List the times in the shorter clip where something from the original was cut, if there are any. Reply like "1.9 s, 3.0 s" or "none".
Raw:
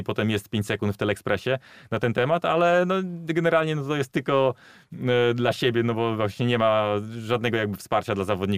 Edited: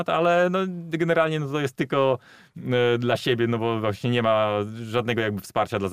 none

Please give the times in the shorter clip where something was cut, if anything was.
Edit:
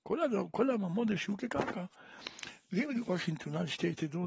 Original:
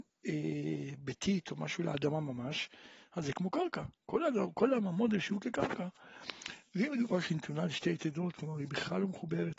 none

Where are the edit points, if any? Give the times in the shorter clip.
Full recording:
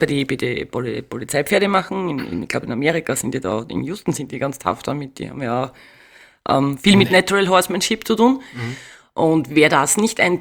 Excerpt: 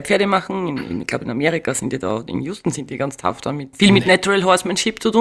3.7 s

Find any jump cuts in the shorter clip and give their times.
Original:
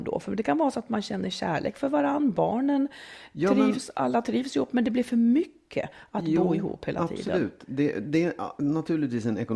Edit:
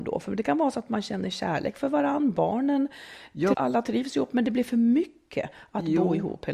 3.5 s

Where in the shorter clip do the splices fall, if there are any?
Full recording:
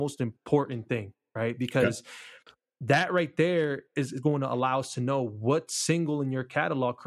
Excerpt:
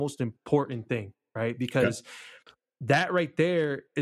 none

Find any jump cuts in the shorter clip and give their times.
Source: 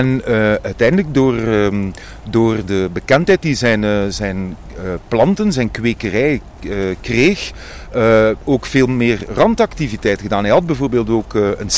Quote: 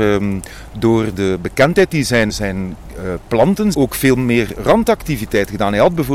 2.3 s, 3.7 s

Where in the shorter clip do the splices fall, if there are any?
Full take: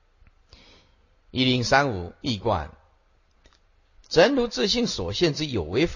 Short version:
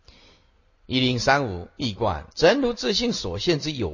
2.3 s

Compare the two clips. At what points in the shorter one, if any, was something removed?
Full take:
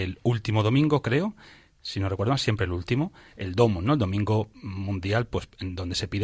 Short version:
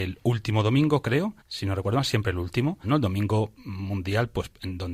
1.4 s, 2.8 s

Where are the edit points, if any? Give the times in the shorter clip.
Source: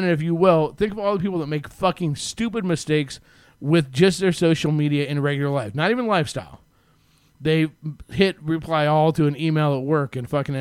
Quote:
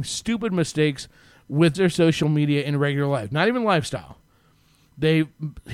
1.7 s

